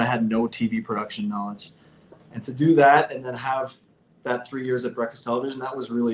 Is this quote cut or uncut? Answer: uncut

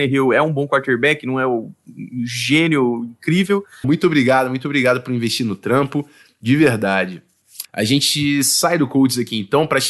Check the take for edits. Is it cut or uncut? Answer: cut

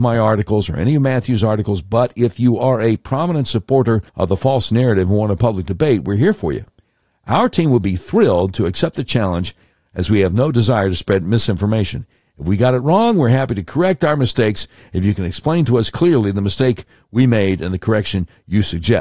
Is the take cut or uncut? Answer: cut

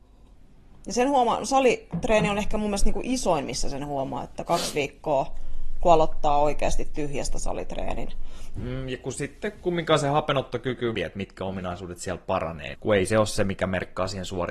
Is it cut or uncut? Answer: cut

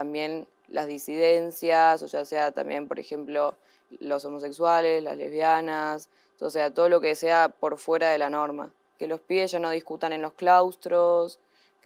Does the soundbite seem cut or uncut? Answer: cut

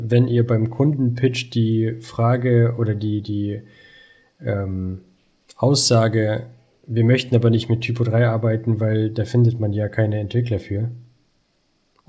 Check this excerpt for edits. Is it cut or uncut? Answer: uncut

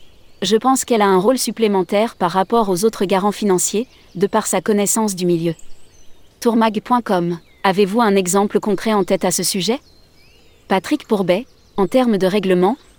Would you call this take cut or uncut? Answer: uncut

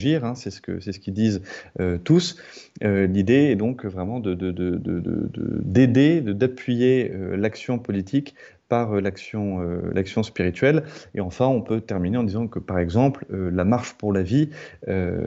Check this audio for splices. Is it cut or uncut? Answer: uncut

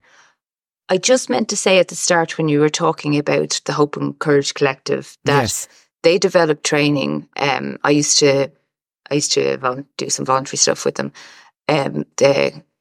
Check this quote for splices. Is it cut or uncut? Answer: uncut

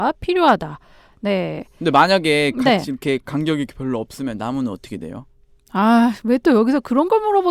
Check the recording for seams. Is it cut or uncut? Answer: uncut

